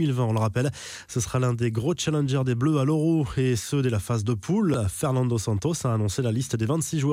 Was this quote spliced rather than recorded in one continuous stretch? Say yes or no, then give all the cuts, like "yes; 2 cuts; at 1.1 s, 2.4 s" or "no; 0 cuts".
no; 0 cuts